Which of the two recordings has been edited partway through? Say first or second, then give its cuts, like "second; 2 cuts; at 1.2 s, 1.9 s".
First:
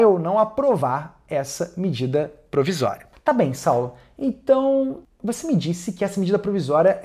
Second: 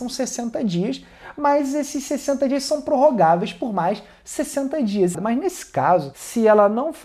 second; 1 cut; at 5.1 s